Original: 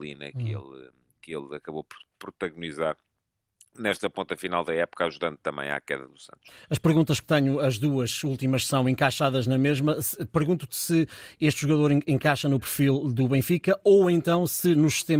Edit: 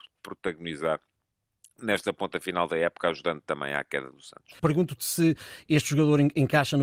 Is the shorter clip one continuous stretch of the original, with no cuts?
no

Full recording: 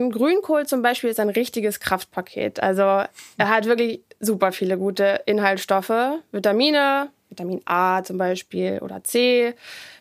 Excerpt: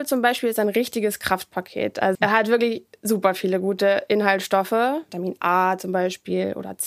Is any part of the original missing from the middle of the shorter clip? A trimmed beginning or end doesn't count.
yes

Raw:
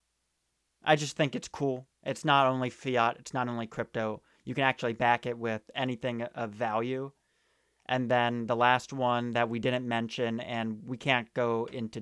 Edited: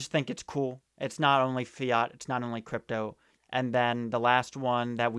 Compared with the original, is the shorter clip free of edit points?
no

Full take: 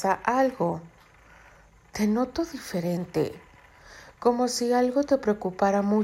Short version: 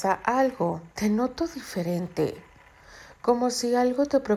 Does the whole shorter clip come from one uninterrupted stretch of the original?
no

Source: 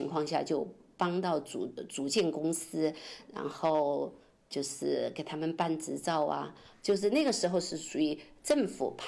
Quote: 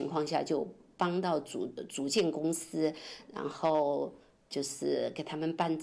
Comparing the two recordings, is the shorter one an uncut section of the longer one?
yes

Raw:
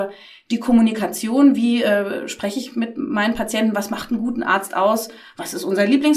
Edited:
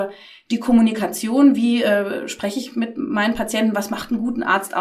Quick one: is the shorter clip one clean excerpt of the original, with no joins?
yes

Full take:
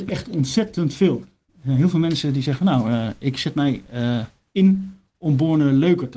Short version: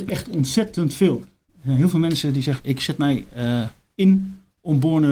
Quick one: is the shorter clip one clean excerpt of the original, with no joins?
no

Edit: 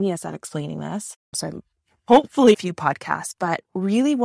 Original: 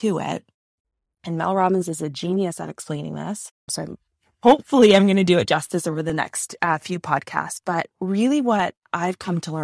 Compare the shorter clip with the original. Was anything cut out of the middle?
yes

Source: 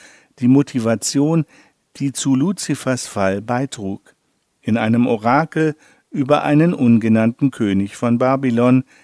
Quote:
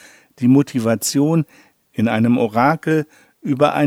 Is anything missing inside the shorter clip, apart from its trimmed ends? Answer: yes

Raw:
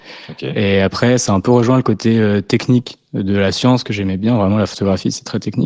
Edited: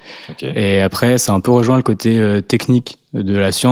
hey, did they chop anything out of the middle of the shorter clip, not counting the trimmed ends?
no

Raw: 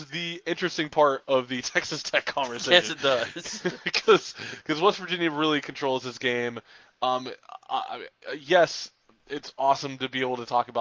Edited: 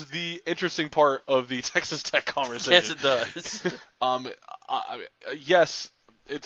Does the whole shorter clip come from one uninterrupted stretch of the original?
no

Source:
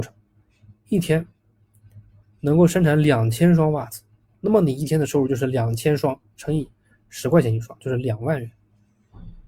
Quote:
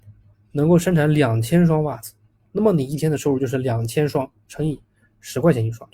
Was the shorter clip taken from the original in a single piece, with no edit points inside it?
yes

